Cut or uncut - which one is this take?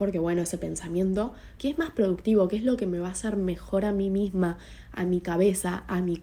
cut